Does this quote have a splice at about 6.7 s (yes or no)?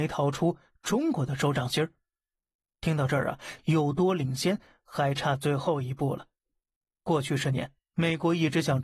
no